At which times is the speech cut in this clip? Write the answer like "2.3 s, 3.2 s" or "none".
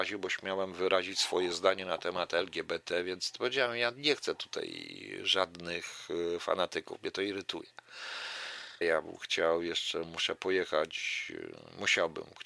8.8 s

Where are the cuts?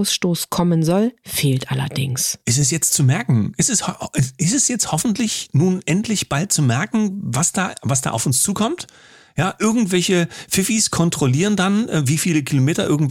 none

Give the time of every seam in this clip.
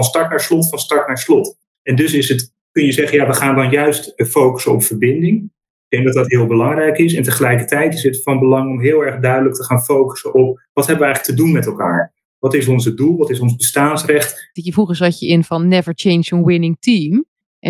14.6 s

